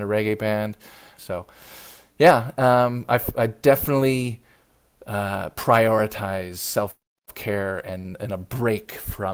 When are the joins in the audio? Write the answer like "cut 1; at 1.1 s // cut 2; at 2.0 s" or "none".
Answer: cut 1; at 1.2 s